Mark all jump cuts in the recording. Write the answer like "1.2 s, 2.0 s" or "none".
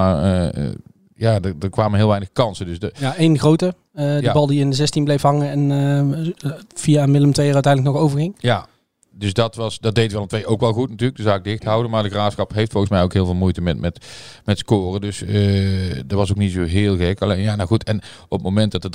none